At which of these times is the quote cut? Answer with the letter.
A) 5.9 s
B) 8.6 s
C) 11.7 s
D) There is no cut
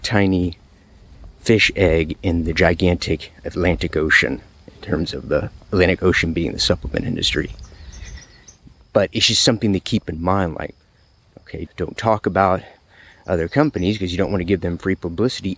C